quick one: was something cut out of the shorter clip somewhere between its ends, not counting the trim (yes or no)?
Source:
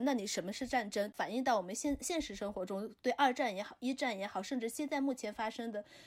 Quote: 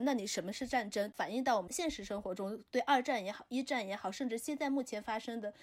yes